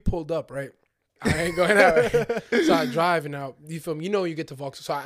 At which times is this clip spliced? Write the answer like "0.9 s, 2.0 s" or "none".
1.2 s